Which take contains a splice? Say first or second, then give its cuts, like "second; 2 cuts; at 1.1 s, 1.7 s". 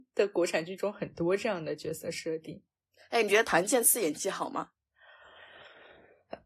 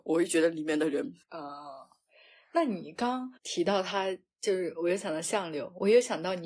second; 2 cuts; at 1.2 s, 3.4 s